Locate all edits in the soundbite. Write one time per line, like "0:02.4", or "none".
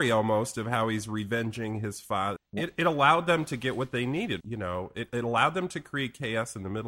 0:02.4
0:04.4

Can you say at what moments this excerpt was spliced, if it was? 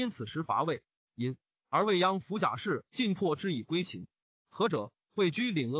0:01.1
0:02.9
0:04.4

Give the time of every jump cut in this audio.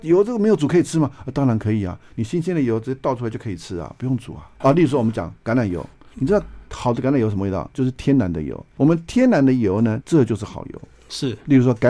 0:04.6
0:07.7
0:10.0

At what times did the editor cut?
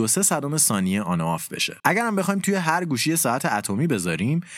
0:01.8

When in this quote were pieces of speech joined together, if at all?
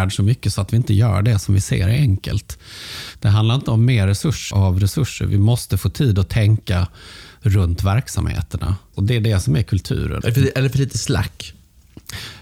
0:04.5
0:08.9
0:10.2

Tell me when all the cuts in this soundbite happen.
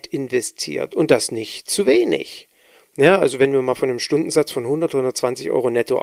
none

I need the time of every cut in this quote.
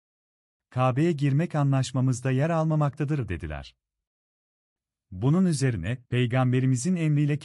0:06.0

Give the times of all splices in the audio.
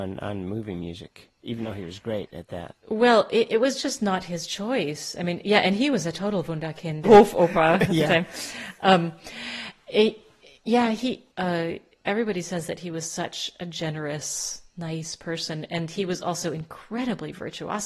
0:07.0
0:11.3

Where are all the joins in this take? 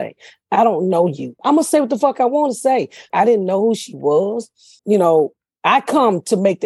0:01.4
0:03.1
0:04.8

